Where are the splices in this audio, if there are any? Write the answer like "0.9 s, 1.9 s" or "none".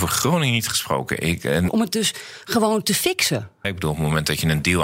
1.7 s, 3.6 s

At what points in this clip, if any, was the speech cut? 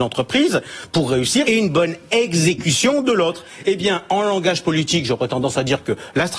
1.4 s

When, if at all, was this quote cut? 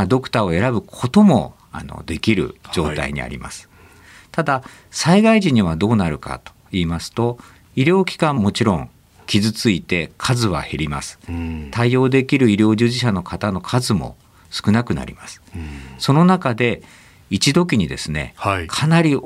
8.4 s

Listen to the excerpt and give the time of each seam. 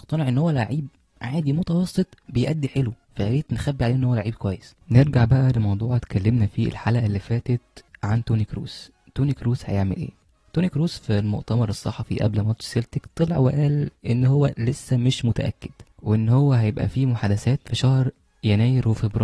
3.0 s, 4.8 s

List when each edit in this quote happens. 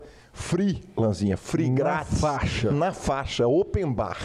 none

